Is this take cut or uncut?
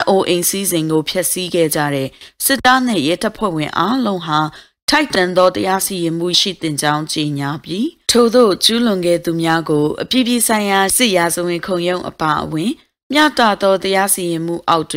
cut